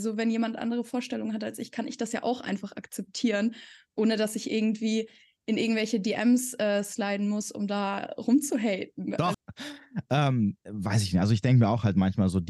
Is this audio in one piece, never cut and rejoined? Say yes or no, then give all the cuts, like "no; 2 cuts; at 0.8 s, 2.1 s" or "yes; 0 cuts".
no; 2 cuts; at 9.3 s, 10.7 s